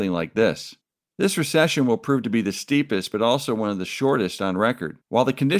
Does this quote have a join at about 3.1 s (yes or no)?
no